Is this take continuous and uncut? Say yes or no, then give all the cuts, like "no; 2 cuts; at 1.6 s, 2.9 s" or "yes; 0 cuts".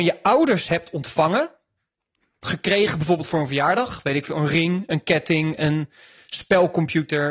yes; 0 cuts